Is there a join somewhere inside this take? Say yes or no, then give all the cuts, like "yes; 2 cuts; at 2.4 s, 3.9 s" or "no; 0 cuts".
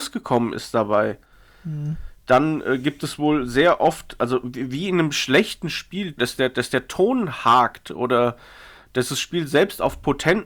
yes; 1 cut; at 6.2 s